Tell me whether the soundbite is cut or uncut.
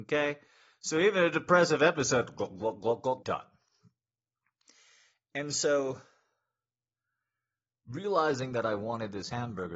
cut